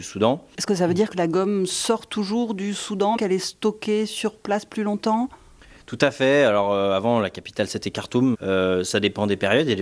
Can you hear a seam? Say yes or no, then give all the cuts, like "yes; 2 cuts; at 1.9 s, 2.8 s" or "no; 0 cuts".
yes; 2 cuts; at 3.2 s, 8.3 s